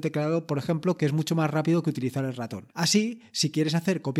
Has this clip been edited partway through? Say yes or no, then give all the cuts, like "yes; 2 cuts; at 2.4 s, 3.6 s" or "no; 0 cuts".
yes; 1 cut; at 2.7 s